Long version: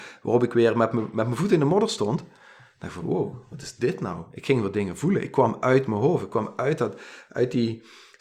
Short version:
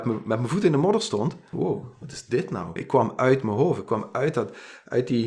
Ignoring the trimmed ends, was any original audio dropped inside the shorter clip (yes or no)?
yes